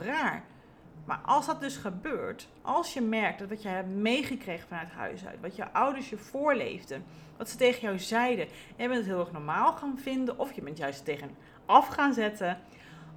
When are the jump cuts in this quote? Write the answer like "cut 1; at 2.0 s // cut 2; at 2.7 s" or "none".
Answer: cut 1; at 2.6 s